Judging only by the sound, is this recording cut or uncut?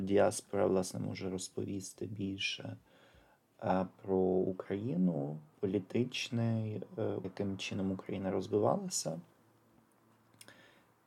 cut